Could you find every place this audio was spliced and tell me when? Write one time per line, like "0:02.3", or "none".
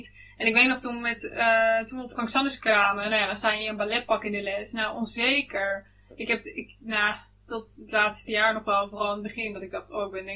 none